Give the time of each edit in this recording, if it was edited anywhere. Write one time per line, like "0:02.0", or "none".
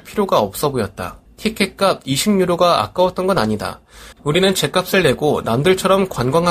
0:01.3
0:04.1

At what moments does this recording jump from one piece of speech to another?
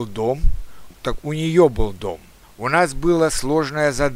0:00.9
0:02.4

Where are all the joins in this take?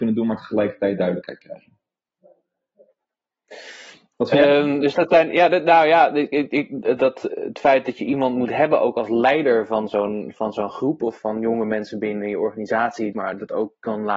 0:07.3
0:13.1

